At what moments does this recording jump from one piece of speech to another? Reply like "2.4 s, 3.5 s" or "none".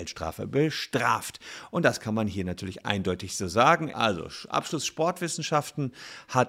3.9 s